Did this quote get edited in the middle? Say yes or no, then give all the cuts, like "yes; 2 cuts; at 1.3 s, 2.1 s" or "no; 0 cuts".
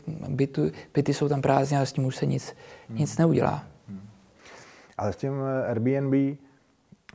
no; 0 cuts